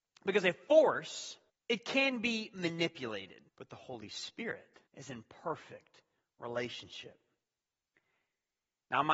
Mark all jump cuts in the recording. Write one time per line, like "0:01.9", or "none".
0:01.5
0:03.5
0:04.9